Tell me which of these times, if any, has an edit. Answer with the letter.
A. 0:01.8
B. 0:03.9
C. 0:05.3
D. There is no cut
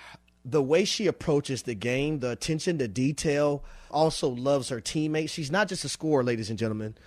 B